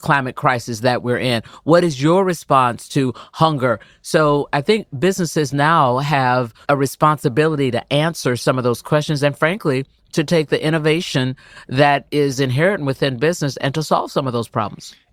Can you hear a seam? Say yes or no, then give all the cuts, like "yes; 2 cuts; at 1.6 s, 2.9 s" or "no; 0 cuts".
yes; 1 cut; at 6.6 s